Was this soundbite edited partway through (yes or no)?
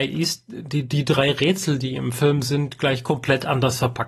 no